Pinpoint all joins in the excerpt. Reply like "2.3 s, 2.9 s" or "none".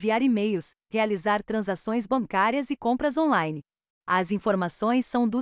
none